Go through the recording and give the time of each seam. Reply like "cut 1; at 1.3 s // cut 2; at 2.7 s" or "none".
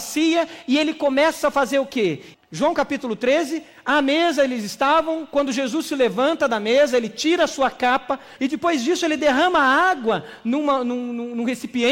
cut 1; at 2.3 s // cut 2; at 8.4 s